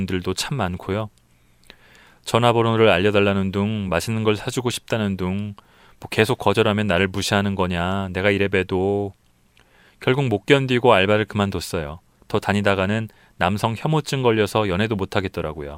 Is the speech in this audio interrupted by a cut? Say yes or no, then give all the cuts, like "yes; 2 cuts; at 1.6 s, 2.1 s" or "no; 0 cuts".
no; 0 cuts